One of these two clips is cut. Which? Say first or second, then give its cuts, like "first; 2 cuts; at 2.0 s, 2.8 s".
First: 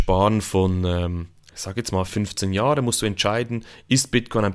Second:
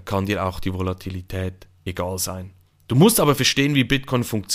first; 1 cut; at 2.1 s